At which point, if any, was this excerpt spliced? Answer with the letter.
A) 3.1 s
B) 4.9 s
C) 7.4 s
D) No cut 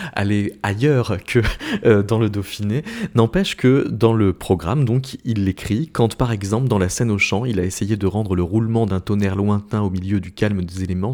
D